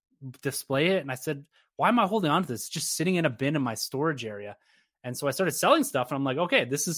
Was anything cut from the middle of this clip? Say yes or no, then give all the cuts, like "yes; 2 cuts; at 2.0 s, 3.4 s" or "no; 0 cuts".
no; 0 cuts